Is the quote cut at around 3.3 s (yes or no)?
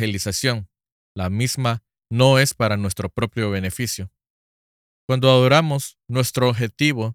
no